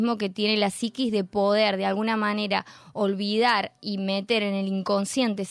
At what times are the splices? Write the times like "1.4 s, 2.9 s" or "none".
none